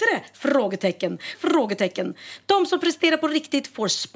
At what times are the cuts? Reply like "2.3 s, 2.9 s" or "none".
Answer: 1.3 s, 2.4 s